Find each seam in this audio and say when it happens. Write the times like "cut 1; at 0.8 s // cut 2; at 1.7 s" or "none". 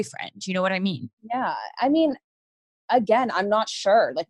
none

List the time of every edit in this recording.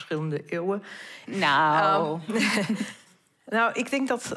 cut 1; at 1.3 s

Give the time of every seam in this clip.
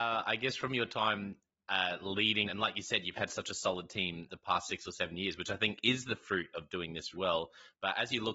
cut 1; at 2.5 s // cut 2; at 4.3 s // cut 3; at 7.1 s

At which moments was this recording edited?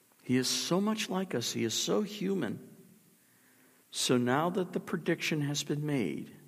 cut 1; at 3.8 s

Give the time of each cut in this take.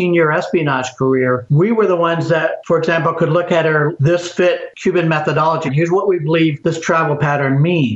cut 1; at 4.0 s // cut 2; at 5.7 s

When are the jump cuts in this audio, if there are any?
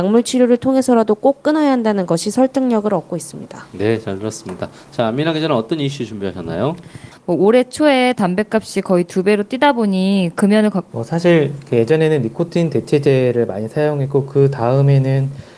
cut 1; at 7.1 s // cut 2; at 10.9 s

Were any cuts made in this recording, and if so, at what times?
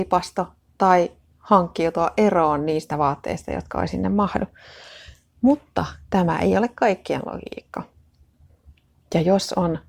none

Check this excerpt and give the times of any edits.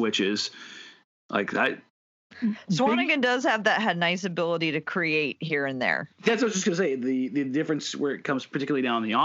none

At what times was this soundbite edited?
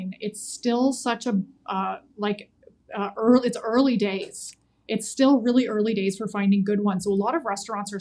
cut 1; at 2.1 s

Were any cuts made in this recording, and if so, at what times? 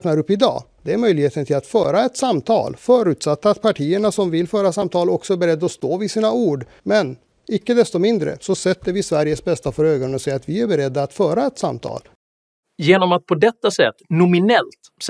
cut 1; at 6.8 s

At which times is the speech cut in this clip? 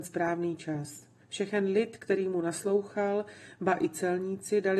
cut 1; at 1.2 s

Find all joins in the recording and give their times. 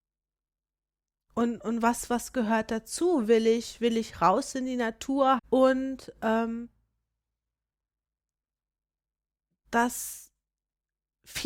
cut 1; at 5.4 s

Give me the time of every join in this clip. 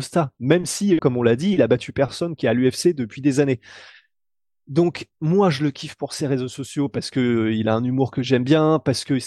cut 1; at 1.0 s

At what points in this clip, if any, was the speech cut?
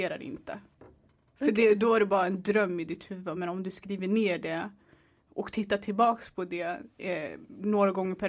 none

